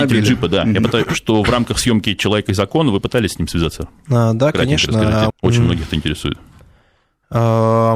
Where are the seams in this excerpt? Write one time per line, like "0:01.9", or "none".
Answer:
0:05.3